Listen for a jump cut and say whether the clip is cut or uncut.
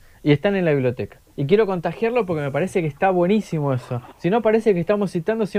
cut